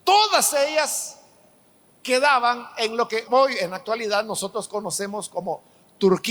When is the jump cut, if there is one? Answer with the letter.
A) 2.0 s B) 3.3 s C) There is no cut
B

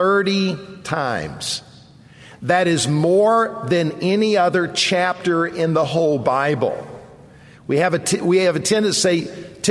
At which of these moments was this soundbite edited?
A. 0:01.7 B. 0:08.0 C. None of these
C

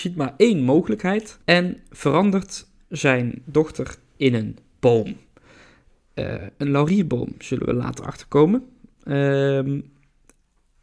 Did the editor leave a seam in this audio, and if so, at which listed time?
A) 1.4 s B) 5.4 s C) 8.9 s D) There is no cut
A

